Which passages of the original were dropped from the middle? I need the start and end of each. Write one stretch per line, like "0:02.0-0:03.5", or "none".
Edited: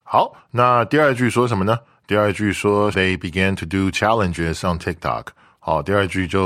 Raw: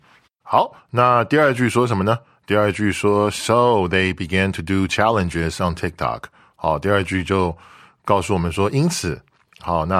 0:03.3-0:03.9